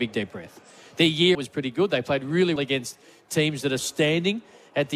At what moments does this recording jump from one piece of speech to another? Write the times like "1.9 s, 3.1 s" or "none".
1.3 s, 2.6 s, 3.8 s